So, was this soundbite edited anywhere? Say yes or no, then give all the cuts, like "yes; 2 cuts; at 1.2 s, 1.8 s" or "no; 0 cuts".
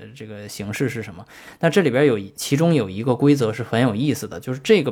no; 0 cuts